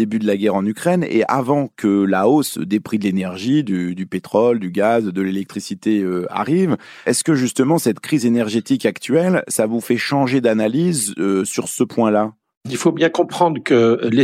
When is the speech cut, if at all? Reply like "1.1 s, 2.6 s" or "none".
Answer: 7.0 s

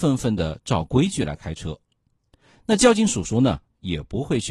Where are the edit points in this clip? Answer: none

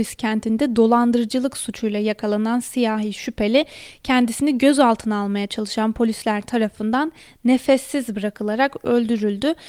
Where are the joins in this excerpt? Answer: none

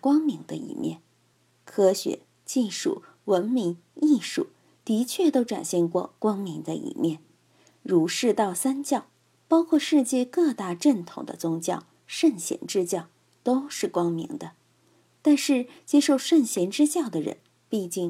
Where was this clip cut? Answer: none

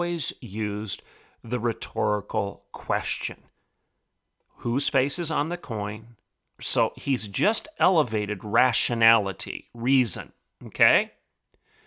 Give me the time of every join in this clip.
6.6 s

